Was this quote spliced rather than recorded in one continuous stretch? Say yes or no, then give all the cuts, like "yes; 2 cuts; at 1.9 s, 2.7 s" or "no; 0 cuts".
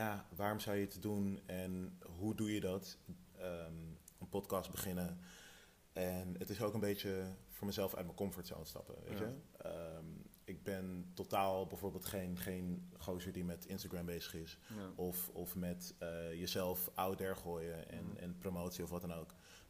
no; 0 cuts